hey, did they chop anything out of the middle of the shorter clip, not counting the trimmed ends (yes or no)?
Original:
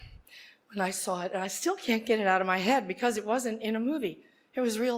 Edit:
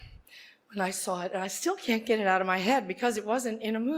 no